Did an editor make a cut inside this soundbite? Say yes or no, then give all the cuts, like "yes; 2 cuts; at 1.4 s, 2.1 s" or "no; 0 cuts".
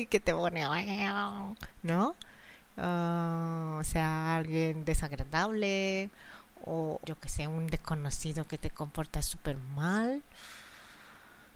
yes; 1 cut; at 7.0 s